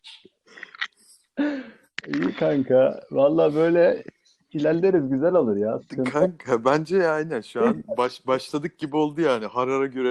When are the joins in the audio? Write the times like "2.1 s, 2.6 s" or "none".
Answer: none